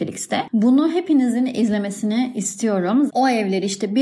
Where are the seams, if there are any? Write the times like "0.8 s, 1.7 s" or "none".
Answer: 3.1 s

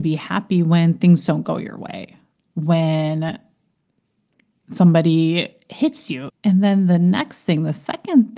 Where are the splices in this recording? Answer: 6.3 s

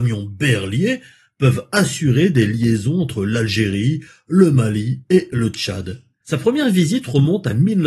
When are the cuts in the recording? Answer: 6.2 s

